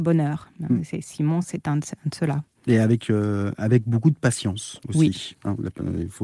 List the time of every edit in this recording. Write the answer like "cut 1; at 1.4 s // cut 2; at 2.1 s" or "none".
none